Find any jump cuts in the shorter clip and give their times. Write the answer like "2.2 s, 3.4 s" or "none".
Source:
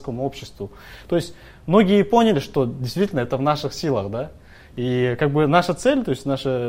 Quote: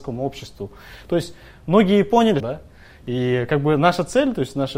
2.4 s